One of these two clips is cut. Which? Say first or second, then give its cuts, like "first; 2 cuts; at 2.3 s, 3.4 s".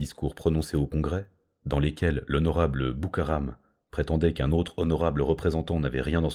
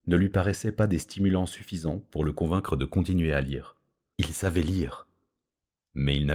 second; 1 cut; at 4.1 s